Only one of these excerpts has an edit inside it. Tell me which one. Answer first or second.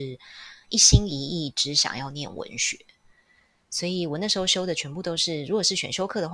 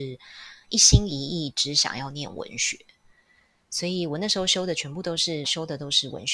second